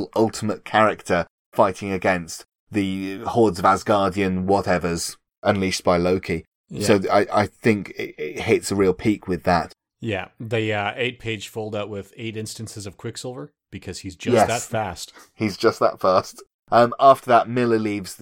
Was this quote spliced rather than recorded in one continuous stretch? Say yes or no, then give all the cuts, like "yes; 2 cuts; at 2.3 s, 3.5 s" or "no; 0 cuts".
no; 0 cuts